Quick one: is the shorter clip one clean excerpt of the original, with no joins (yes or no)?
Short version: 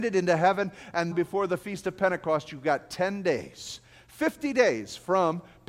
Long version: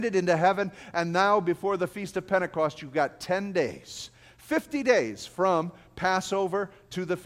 no